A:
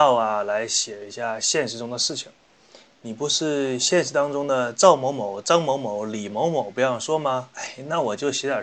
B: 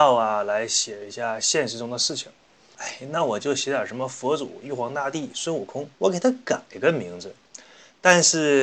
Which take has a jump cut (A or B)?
B